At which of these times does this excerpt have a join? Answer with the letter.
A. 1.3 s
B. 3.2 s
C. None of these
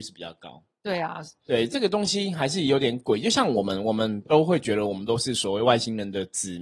C